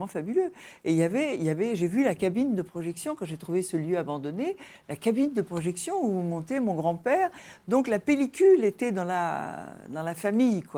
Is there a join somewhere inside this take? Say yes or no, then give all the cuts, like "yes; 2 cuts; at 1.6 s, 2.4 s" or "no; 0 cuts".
no; 0 cuts